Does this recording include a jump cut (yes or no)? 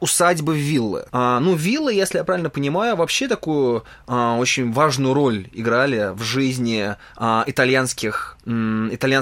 yes